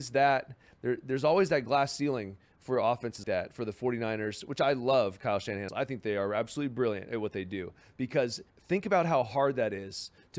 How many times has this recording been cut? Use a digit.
3